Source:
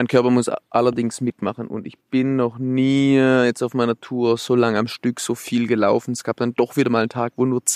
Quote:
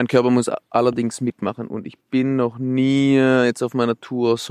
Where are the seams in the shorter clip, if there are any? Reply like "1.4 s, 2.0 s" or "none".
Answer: none